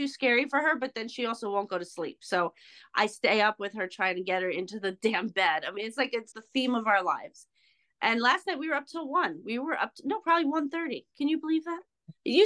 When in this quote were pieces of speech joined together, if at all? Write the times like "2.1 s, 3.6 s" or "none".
6.3 s